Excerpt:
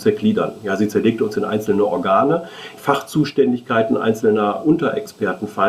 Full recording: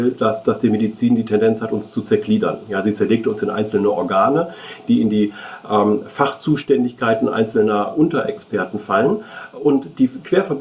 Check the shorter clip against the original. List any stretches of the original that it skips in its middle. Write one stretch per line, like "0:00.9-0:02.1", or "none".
0:04.8-0:06.1